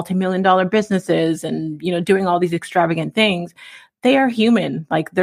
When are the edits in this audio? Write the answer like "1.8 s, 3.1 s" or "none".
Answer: none

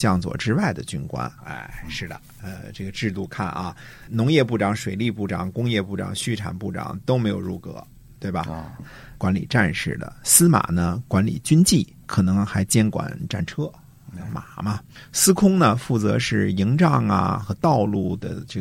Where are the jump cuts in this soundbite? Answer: 1.4 s, 8.8 s

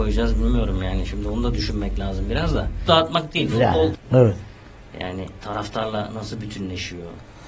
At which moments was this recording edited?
2.9 s, 3.9 s

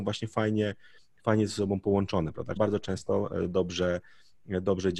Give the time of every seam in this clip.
2.6 s

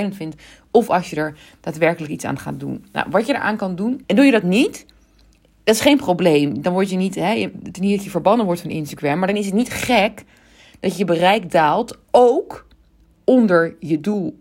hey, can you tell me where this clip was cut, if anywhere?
4.0 s

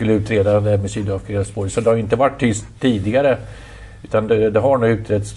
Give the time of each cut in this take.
none

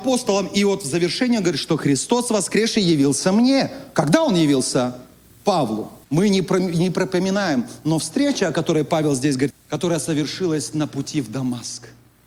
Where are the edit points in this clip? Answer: 6.0 s, 9.5 s

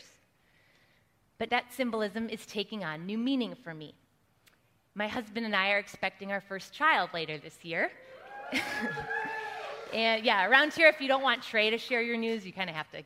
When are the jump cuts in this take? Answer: 1.5 s

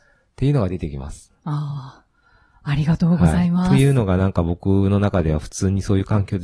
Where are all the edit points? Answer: none

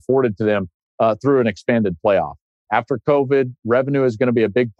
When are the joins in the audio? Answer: 2.7 s

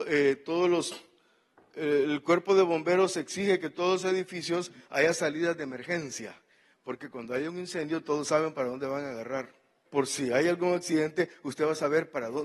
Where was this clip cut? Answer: 9.9 s

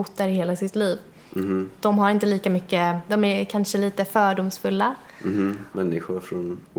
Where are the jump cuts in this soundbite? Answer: 3.1 s, 5.7 s

